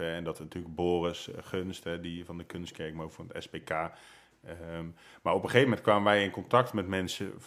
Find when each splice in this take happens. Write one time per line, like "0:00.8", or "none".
none